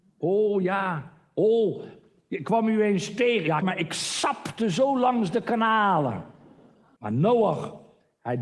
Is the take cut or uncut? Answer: cut